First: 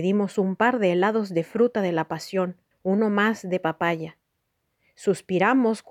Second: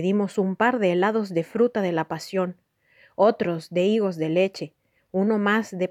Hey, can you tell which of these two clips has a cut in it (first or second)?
first